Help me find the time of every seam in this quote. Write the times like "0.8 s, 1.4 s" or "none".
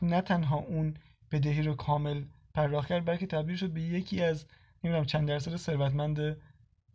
none